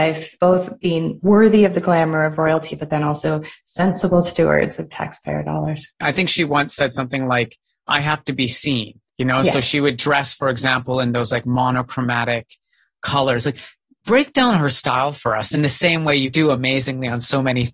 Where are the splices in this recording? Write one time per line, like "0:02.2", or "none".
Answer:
0:05.9